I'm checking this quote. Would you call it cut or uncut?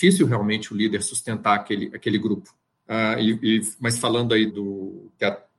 cut